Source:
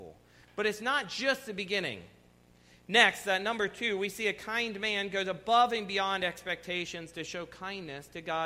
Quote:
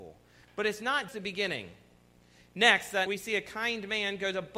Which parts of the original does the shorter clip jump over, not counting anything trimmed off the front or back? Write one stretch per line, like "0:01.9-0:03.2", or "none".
0:01.1-0:01.4
0:03.4-0:04.0